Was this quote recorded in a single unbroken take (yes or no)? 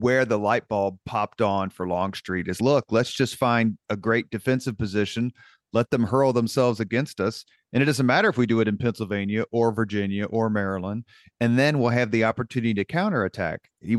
yes